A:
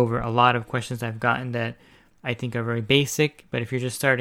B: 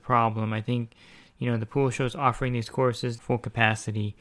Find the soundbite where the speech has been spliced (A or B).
B